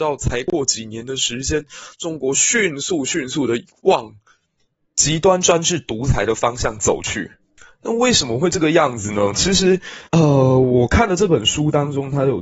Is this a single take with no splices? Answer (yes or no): no